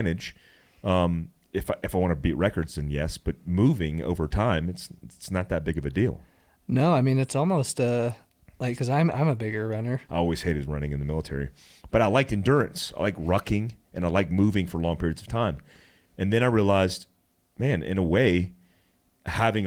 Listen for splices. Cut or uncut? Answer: cut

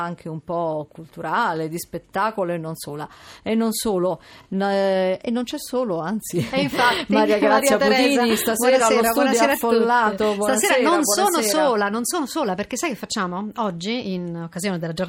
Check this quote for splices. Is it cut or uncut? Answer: uncut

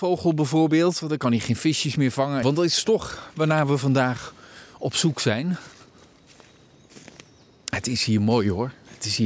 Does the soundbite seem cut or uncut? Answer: cut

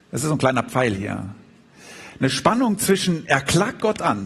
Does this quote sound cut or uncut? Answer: uncut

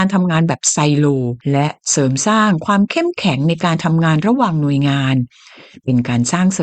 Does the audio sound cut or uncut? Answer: cut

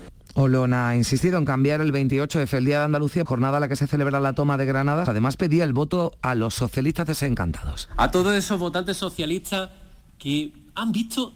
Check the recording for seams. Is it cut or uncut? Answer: cut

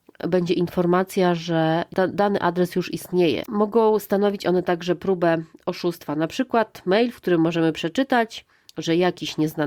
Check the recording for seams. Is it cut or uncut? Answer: cut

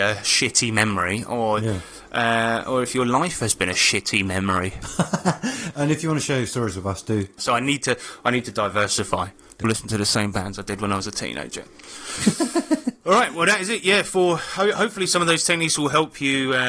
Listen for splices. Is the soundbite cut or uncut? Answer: cut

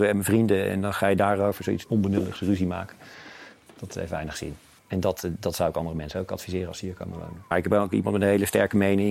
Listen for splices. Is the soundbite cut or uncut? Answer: cut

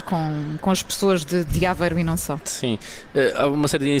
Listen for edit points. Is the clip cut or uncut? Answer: uncut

